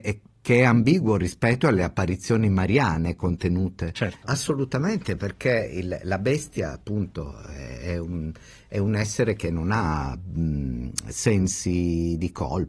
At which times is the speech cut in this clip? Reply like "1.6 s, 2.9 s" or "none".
4.2 s